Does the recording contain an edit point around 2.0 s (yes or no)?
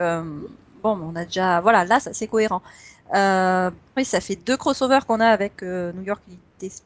yes